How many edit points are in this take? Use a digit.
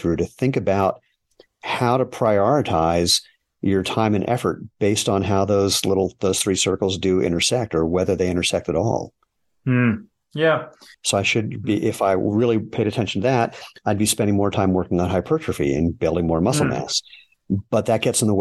1